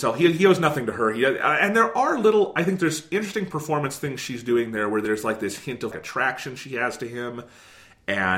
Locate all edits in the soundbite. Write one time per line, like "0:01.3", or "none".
0:05.9